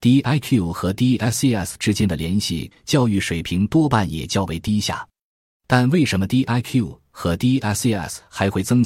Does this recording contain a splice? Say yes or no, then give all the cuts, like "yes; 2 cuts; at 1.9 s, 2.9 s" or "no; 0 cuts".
yes; 1 cut; at 2.7 s